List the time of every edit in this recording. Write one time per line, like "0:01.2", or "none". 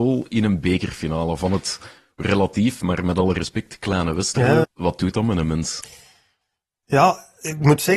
0:04.6